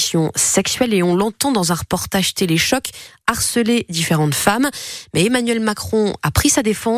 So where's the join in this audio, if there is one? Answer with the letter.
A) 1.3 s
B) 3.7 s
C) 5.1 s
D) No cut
D